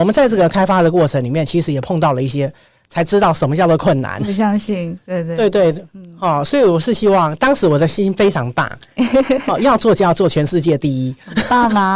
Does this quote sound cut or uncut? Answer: uncut